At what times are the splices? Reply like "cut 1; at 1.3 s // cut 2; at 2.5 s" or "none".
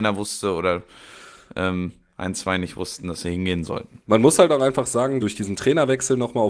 cut 1; at 4.0 s // cut 2; at 5.2 s

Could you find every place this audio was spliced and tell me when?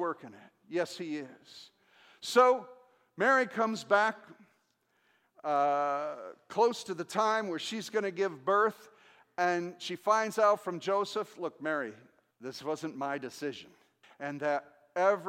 cut 1; at 12.3 s // cut 2; at 14.0 s

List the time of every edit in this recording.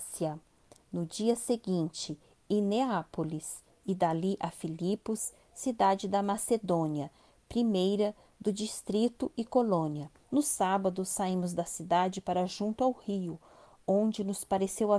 cut 1; at 10.2 s

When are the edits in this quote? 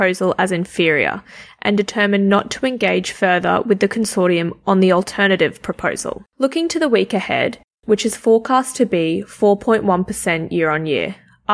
cut 1; at 6.3 s // cut 2; at 7.8 s

